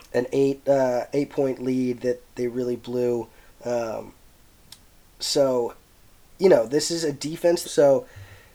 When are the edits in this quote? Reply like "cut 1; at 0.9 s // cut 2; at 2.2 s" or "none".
cut 1; at 7.6 s

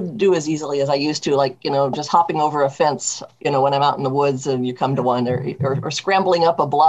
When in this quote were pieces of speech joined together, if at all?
none

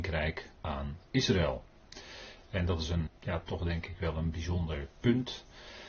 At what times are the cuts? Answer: cut 1; at 3.1 s

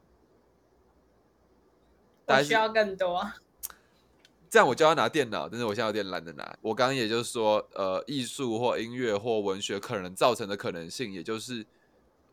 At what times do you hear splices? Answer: cut 1; at 6.6 s

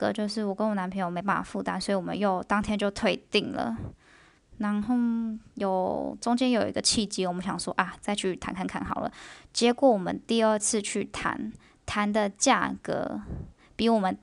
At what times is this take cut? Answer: none

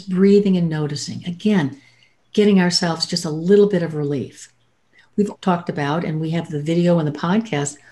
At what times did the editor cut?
cut 1; at 5.3 s

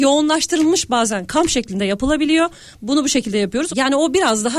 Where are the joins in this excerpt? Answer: cut 1; at 3.7 s

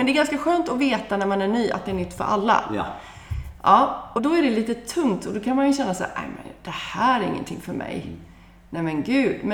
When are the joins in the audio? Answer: cut 1; at 4.2 s

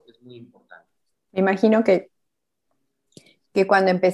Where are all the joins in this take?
cut 1; at 1.1 s

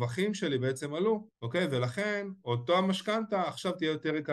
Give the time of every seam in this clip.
cut 1; at 1.3 s

